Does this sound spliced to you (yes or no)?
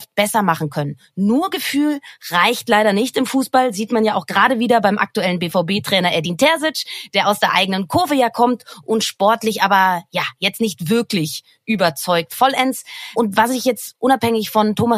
no